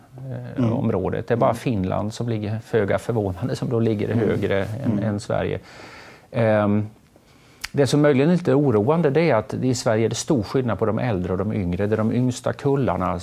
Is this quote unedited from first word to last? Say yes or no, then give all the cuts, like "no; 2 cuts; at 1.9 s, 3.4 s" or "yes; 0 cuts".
yes; 0 cuts